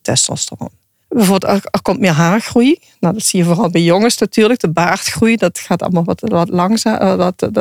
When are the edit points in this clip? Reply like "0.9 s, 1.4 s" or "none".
1.0 s